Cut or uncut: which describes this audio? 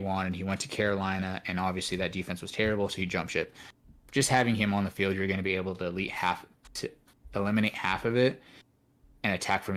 uncut